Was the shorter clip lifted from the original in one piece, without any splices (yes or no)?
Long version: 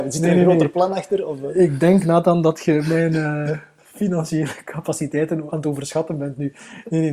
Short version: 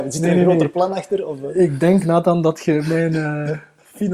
yes